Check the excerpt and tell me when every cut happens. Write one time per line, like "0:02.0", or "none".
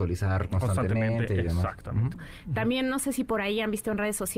0:02.1